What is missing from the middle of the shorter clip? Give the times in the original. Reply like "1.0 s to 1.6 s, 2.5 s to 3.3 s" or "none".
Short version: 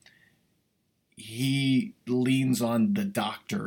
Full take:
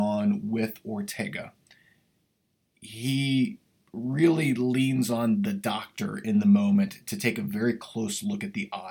3.7 s to 4.5 s